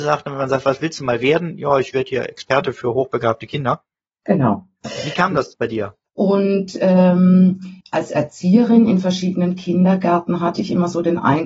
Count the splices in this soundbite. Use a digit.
2